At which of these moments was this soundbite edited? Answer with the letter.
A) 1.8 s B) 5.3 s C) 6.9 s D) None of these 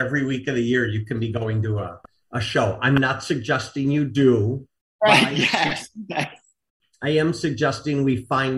D